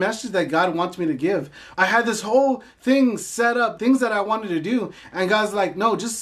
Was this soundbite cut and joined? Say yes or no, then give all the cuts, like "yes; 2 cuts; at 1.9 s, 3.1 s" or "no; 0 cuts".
yes; 2 cuts; at 1.7 s, 3.8 s